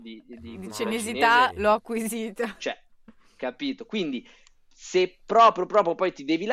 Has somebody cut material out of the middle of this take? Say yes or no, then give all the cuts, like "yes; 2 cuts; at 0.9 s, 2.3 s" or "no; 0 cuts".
no; 0 cuts